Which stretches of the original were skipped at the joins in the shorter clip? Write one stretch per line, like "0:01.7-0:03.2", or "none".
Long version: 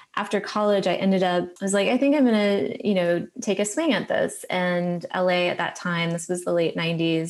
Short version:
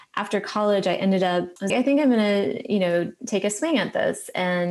0:01.7-0:01.8